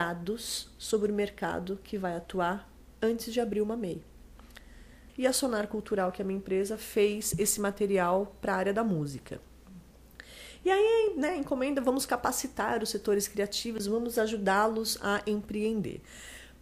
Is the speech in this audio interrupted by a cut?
yes; 1 cut; at 5.1 s

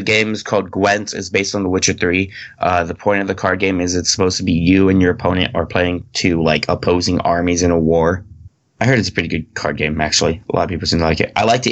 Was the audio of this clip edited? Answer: no; 0 cuts

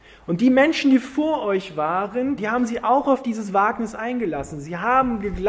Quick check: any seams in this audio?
yes; 1 cut; at 2.4 s

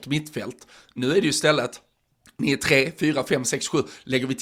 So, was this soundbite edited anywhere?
no; 0 cuts

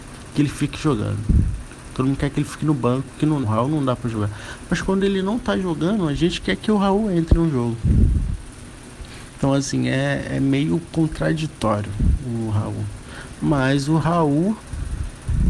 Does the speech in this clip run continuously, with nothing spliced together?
no; 2 cuts; at 3.4 s, 13.4 s

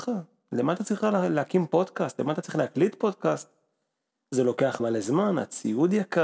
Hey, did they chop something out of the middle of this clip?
yes; 1 cut; at 4.8 s

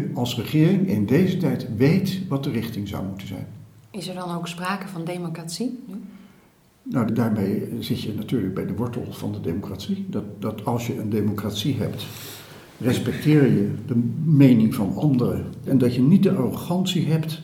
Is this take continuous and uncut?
no; 2 cuts; at 7.1 s, 15.7 s

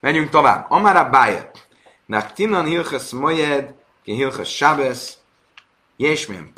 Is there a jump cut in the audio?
no; 0 cuts

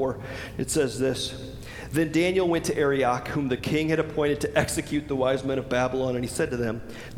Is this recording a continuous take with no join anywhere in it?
yes; 0 cuts

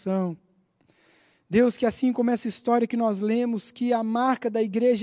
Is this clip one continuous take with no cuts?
yes; 0 cuts

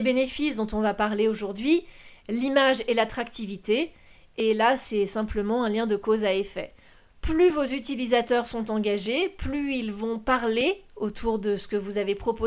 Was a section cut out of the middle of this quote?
no; 0 cuts

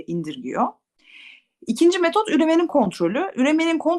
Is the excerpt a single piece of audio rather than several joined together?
yes; 0 cuts

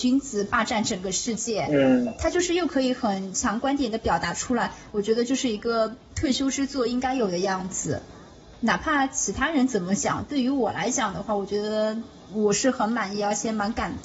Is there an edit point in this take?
no; 0 cuts

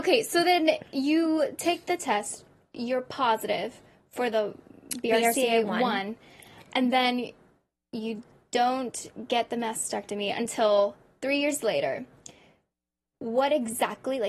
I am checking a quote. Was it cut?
no; 0 cuts

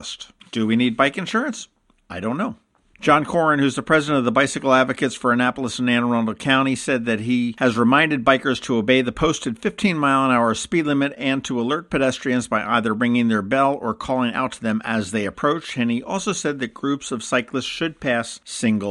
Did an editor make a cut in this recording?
yes; 1 cut; at 2.9 s

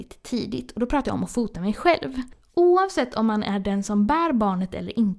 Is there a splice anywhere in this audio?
no; 0 cuts

